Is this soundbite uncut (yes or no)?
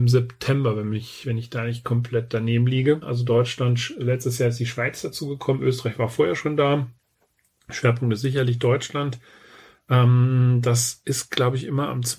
no